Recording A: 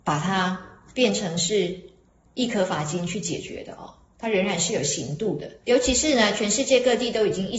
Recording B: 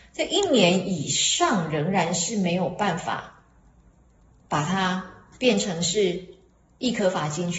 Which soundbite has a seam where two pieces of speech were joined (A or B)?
A